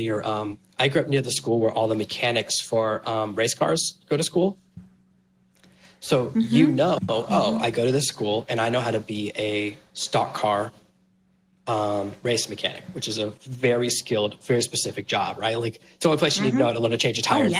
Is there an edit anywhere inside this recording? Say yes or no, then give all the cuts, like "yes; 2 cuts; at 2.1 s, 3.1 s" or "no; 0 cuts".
no; 0 cuts